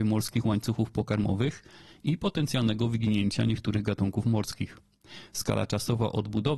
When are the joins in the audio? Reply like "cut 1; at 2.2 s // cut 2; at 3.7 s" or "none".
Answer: none

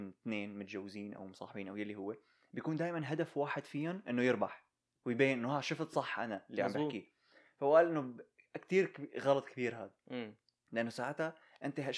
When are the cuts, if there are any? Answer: none

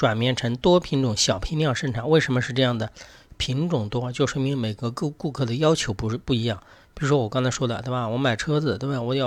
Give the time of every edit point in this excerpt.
none

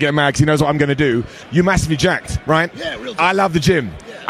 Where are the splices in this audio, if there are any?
none

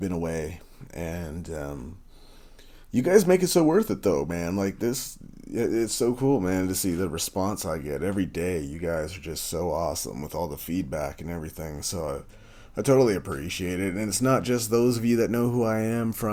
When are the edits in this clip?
none

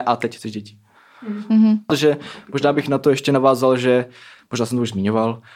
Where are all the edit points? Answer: cut 1; at 1.9 s

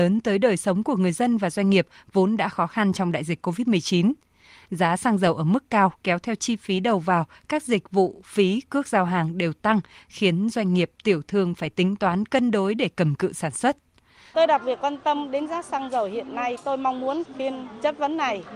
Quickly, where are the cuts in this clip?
cut 1; at 14.3 s

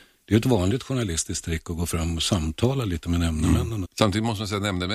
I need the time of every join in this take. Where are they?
cut 1; at 3.9 s

